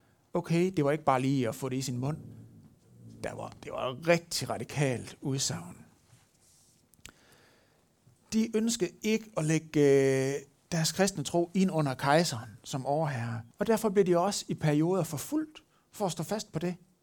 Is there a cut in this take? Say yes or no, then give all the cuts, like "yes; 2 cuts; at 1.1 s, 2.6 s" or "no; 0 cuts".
yes; 2 cuts; at 8.2 s, 13.5 s